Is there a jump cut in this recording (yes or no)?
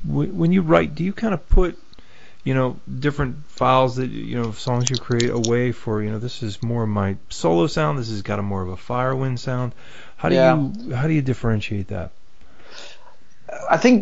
no